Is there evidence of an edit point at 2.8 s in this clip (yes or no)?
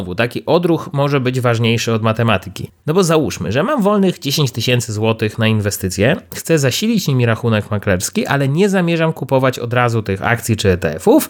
no